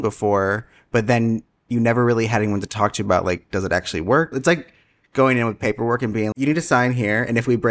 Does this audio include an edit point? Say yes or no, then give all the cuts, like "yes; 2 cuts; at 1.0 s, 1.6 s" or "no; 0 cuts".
yes; 2 cuts; at 4.3 s, 6.3 s